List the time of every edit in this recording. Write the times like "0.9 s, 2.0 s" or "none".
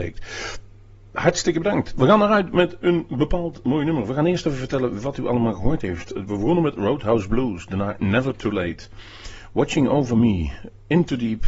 none